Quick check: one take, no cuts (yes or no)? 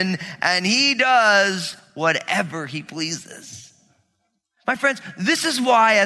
yes